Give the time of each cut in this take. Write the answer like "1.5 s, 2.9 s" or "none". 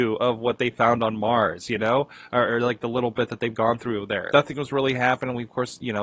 4.3 s